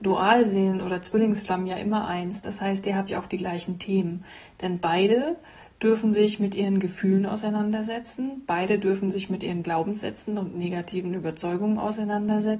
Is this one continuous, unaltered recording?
no; 1 cut; at 3.1 s

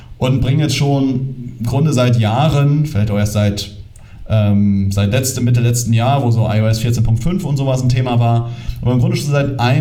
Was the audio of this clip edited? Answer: no; 0 cuts

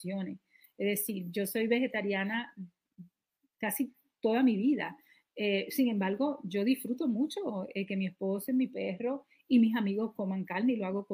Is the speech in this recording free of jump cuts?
yes; 0 cuts

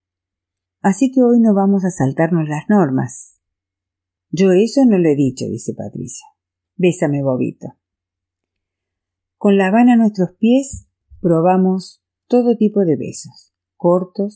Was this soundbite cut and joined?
no; 0 cuts

